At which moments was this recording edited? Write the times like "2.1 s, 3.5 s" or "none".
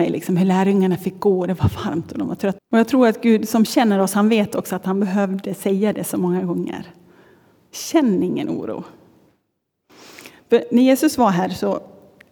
2.6 s